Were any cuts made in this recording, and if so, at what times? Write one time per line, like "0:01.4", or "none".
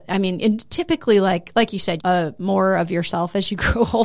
0:02.0